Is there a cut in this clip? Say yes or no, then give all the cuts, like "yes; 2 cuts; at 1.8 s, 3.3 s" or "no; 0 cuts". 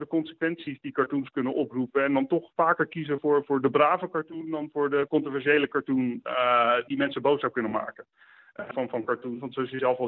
yes; 2 cuts; at 6.9 s, 8.7 s